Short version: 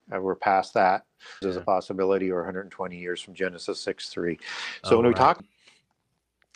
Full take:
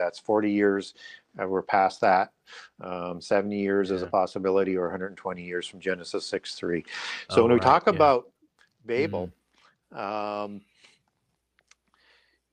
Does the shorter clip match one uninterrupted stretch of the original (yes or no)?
no